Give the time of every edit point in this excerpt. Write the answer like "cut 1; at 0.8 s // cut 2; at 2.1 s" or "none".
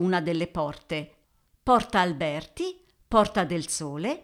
none

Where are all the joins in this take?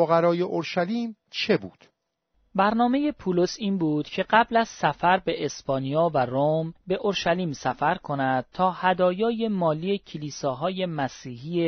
none

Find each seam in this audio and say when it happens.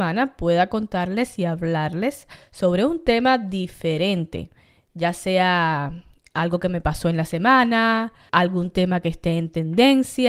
none

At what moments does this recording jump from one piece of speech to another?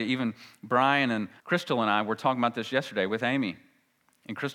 cut 1; at 1.4 s

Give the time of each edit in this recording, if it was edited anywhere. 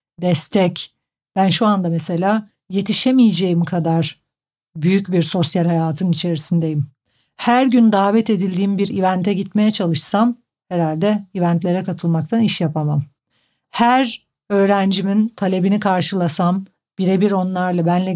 none

